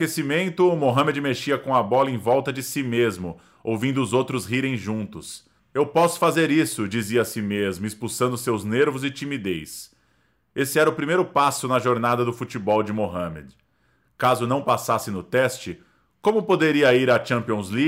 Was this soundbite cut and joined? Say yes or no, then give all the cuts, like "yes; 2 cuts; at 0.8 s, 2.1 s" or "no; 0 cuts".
yes; 1 cut; at 5.6 s